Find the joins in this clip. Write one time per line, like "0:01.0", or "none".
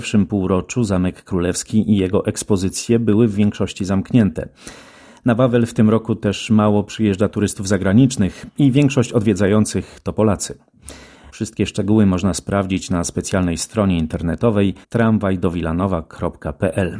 0:11.3
0:14.8